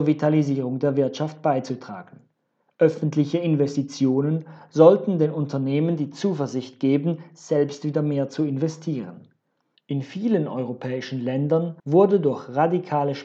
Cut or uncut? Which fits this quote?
cut